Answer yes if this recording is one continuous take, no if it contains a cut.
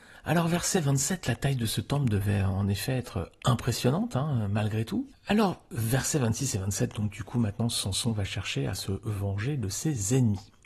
no